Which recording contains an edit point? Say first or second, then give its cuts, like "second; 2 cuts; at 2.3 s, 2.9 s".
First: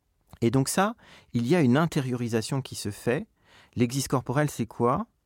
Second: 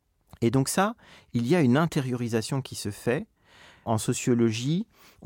first; 1 cut; at 3.6 s